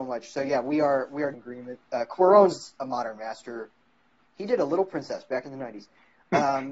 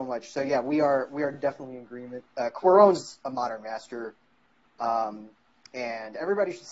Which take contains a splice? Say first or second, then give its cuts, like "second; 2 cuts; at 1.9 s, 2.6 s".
first; 2 cuts; at 1.3 s, 4.2 s